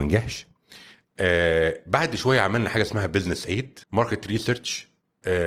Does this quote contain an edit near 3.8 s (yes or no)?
yes